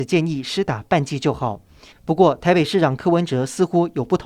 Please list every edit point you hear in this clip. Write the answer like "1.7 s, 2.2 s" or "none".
1.9 s